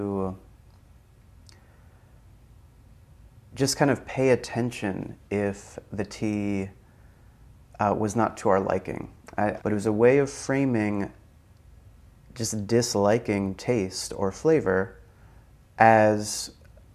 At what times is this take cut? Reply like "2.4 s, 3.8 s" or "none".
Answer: 9.6 s